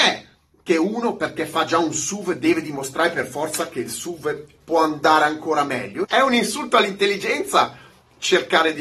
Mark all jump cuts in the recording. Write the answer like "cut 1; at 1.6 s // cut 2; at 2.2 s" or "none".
cut 1; at 6.0 s